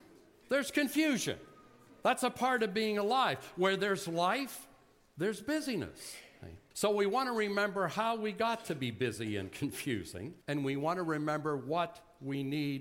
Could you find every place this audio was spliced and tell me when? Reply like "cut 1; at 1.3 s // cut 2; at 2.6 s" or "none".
cut 1; at 6.7 s // cut 2; at 10.4 s